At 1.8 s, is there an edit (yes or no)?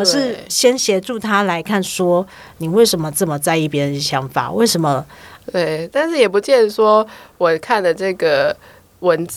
no